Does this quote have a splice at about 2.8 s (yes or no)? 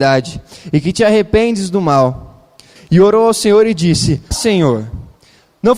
yes